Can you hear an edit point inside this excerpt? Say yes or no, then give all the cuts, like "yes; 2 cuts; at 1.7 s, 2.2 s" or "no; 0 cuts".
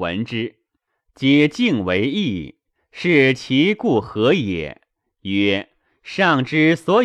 no; 0 cuts